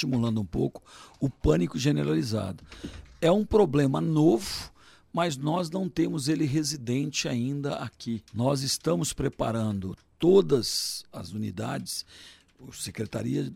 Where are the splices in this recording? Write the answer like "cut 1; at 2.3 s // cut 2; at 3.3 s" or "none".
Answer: cut 1; at 8.3 s